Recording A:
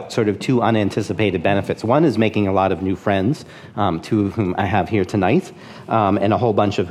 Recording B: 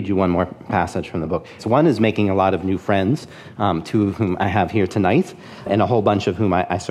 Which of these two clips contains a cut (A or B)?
B